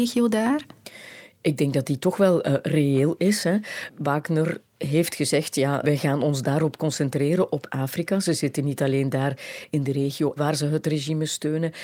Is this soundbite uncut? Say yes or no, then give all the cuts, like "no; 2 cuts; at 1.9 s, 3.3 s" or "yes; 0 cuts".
no; 2 cuts; at 5.8 s, 10.4 s